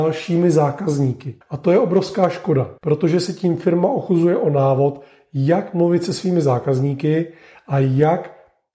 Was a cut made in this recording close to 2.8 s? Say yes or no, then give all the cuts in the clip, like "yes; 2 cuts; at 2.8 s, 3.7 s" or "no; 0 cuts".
yes; 2 cuts; at 1.4 s, 2.8 s